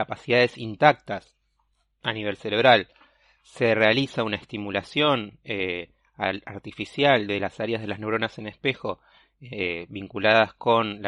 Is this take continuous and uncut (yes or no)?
yes